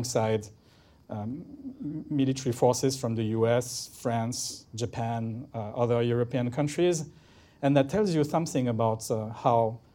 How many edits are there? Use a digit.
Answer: 0